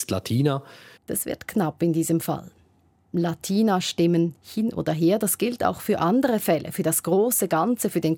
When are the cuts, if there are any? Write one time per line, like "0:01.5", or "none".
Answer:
0:01.0